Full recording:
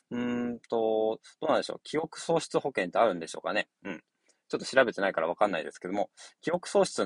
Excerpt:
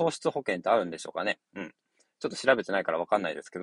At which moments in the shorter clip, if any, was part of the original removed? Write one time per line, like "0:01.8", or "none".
none